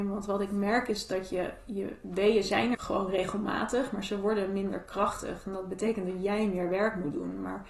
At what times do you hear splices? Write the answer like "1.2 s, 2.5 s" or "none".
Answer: 2.7 s